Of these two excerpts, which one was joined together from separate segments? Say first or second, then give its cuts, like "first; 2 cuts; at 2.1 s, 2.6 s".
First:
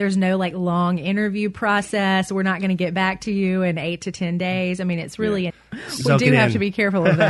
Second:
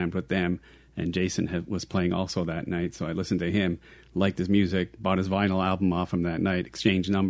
first; 1 cut; at 5.5 s